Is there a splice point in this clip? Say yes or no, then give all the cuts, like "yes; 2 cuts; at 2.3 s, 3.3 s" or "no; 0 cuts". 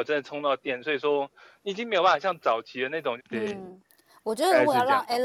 yes; 1 cut; at 3.2 s